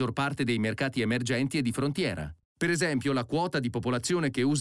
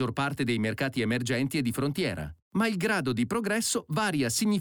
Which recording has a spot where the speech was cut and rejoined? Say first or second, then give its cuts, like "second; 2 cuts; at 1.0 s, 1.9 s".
first; 1 cut; at 2.4 s